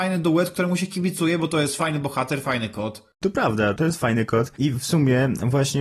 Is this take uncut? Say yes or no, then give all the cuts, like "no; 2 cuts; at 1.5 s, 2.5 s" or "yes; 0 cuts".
yes; 0 cuts